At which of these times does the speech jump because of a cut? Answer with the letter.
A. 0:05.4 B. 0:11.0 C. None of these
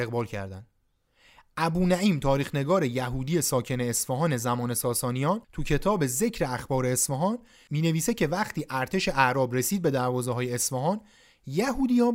A